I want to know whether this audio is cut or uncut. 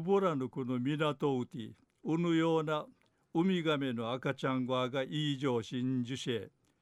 uncut